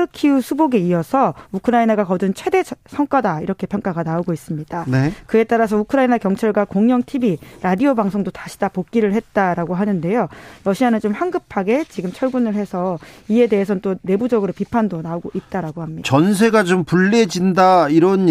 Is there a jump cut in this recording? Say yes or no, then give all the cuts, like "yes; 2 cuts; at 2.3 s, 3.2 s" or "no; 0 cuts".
yes; 1 cut; at 16.0 s